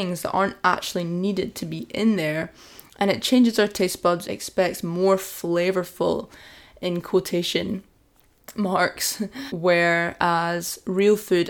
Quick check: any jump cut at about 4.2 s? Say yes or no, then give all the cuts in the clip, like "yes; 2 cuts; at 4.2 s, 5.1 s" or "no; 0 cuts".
yes; 2 cuts; at 4.2 s, 9.5 s